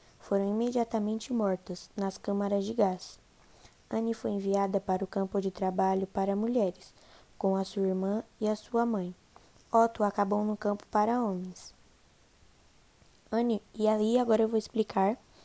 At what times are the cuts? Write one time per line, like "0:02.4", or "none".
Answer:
none